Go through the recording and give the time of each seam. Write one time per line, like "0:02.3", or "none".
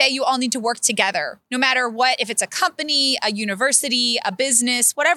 none